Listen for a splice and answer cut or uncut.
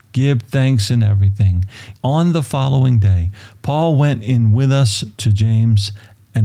cut